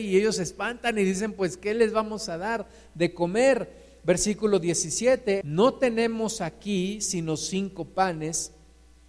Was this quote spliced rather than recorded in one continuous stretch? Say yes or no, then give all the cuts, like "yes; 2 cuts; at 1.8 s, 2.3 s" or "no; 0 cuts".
yes; 1 cut; at 5.4 s